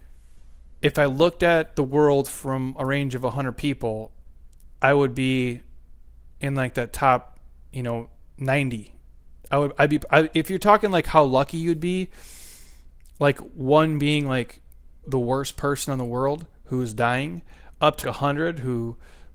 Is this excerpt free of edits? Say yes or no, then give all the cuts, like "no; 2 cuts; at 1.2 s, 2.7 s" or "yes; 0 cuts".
no; 2 cuts; at 15.0 s, 18.0 s